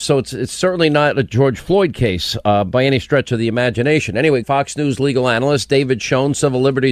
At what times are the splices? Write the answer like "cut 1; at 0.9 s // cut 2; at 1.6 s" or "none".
cut 1; at 4.4 s